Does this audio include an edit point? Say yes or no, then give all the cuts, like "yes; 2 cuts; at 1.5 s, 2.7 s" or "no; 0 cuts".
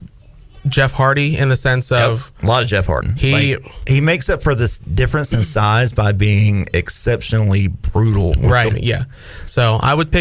yes; 2 cuts; at 3.0 s, 8.7 s